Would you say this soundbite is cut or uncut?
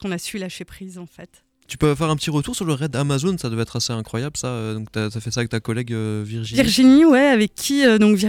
uncut